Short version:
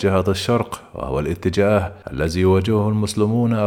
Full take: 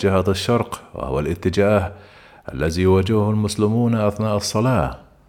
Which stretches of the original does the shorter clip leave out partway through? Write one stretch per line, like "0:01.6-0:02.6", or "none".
0:02.0-0:02.4